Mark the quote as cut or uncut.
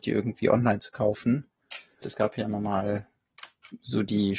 cut